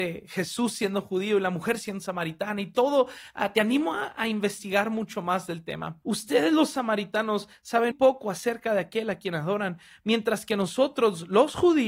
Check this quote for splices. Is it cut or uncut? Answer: cut